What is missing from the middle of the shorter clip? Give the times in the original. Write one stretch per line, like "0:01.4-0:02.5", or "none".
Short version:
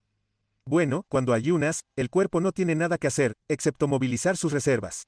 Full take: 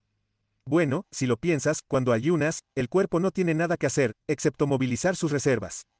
0:01.0-0:01.8